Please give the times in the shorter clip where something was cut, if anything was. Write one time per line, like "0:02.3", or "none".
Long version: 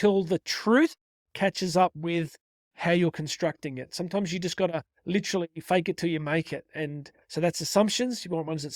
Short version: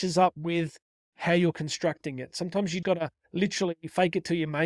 0:02.8